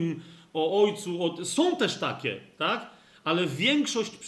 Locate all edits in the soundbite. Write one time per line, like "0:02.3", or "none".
none